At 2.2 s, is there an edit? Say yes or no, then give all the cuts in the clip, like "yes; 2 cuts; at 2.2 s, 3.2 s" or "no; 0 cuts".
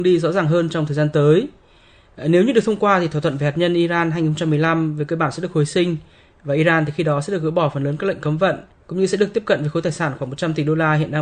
no; 0 cuts